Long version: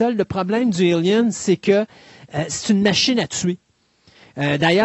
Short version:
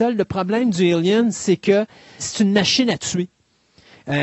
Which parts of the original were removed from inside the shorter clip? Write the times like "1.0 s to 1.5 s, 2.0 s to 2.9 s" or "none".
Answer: 2.2 s to 2.5 s